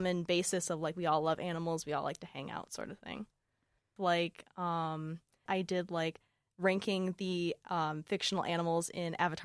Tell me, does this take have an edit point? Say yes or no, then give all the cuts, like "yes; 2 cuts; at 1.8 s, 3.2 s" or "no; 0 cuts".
yes; 2 cuts; at 4.0 s, 5.5 s